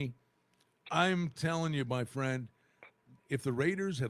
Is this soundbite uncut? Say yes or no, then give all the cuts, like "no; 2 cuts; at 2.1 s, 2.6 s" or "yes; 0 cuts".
no; 1 cut; at 3.2 s